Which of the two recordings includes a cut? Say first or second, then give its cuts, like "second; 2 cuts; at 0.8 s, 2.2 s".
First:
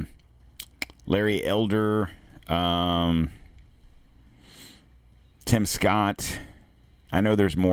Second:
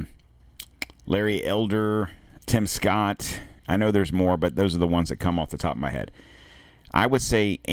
second; 2 cuts; at 2.4 s, 3.6 s